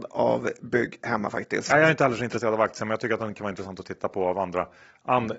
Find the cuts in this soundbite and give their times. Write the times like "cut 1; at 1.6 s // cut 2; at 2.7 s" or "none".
none